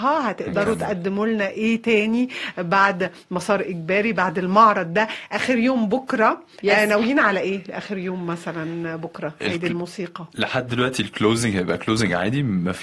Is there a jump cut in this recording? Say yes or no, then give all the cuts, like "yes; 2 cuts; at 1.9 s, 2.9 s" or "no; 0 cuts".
no; 0 cuts